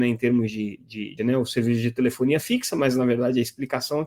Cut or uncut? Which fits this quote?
cut